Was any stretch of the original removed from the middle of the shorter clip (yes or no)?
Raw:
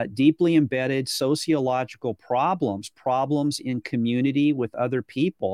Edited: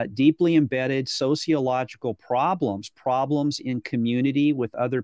no